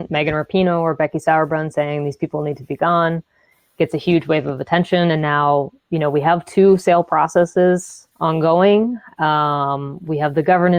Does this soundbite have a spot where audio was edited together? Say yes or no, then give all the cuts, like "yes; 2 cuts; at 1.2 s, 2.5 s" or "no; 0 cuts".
yes; 1 cut; at 8.1 s